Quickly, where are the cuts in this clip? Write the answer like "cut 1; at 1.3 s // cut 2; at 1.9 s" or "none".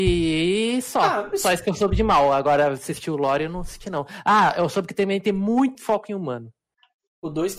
cut 1; at 5.7 s